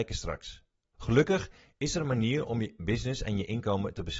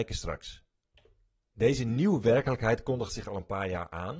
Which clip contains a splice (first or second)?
first